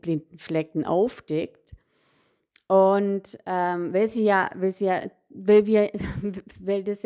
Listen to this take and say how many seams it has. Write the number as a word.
zero